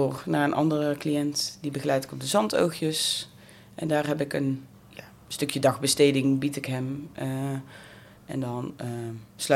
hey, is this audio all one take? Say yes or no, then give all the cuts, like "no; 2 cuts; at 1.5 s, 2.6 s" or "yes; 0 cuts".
no; 1 cut; at 4.7 s